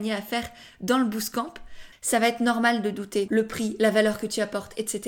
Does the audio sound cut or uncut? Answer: cut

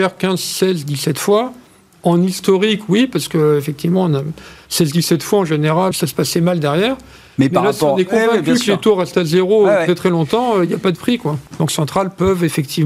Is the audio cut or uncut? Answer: cut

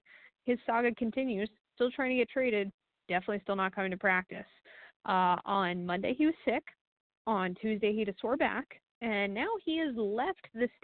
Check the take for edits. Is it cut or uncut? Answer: uncut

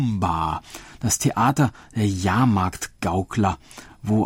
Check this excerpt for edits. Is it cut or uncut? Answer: uncut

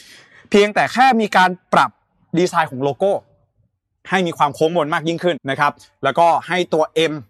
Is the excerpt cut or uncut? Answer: cut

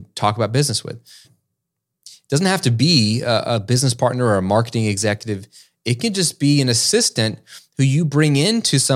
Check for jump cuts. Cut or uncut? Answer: cut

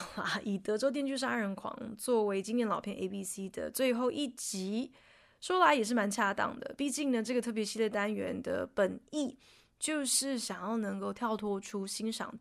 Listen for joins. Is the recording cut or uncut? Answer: uncut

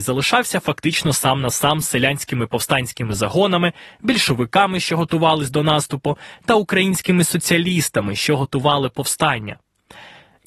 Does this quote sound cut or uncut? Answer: uncut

